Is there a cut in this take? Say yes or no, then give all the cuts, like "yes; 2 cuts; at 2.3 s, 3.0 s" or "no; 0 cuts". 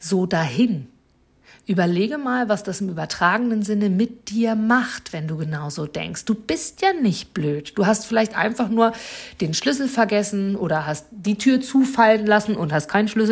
no; 0 cuts